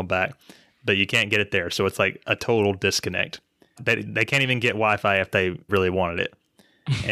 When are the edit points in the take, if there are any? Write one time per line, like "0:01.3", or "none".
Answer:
0:03.8
0:05.7